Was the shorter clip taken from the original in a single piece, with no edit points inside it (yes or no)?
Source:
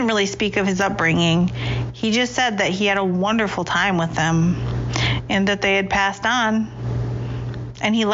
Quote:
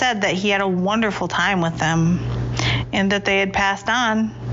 yes